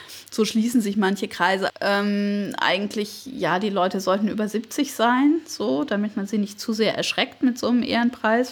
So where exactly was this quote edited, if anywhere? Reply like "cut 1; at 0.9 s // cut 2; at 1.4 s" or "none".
cut 1; at 1.7 s

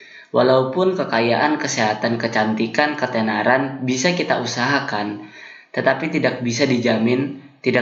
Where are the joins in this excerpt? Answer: none

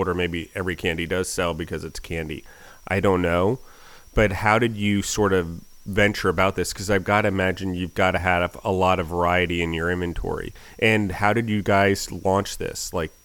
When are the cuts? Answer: none

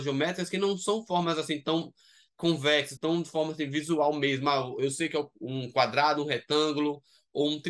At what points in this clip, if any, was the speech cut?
cut 1; at 3.0 s

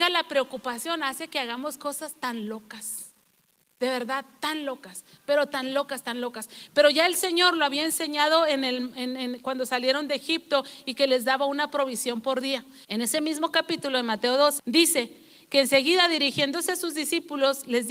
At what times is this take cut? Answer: cut 1; at 12.8 s // cut 2; at 14.6 s

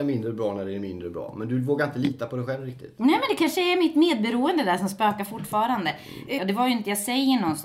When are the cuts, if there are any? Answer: cut 1; at 6.4 s

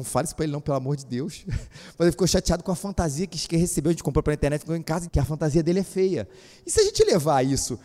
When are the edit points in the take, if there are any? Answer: cut 1; at 5.1 s

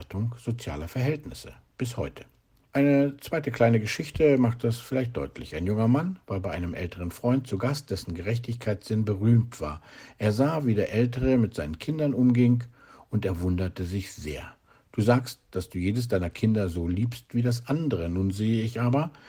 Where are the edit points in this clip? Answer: cut 1; at 2.7 s

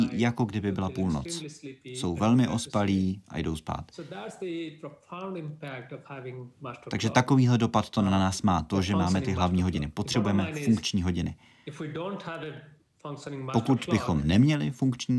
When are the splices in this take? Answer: none

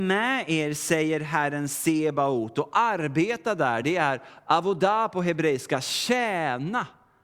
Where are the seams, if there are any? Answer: none

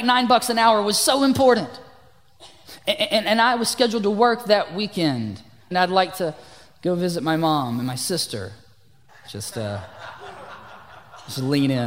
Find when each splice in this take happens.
cut 1; at 5.7 s // cut 2; at 9.1 s

